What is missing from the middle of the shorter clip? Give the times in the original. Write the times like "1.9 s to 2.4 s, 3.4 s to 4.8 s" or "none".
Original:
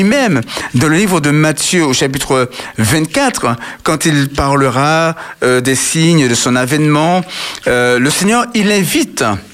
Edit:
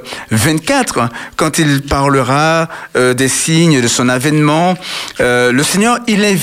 none